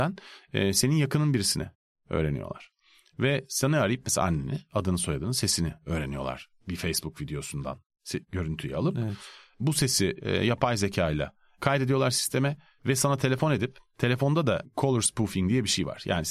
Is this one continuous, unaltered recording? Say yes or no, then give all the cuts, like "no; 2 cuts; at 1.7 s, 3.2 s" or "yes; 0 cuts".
yes; 0 cuts